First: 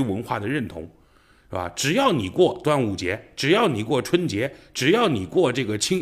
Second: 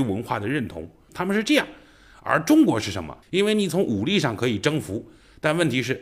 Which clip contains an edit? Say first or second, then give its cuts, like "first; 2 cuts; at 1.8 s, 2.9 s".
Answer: second; 2 cuts; at 1.1 s, 3.2 s